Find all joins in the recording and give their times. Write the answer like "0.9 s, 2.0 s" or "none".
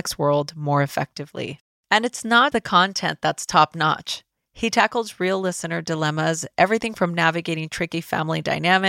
2.5 s, 4.4 s

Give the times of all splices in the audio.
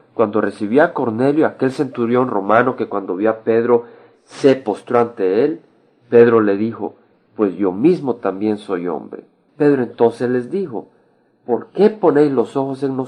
7.1 s, 9.5 s

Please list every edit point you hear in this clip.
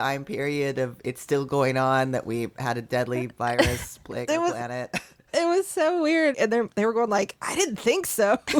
6.3 s

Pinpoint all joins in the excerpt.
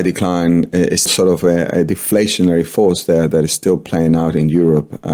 1.1 s

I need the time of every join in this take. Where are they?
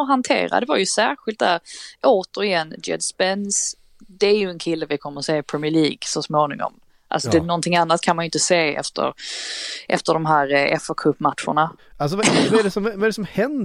11.8 s

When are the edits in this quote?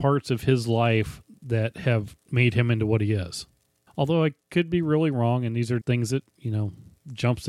3.9 s, 5.8 s

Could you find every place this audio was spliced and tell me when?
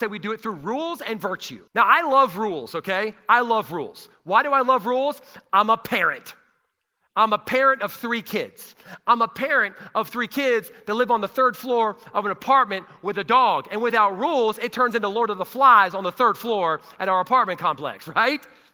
1.7 s

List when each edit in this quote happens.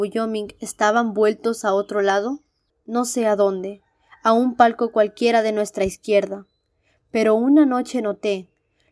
2.7 s

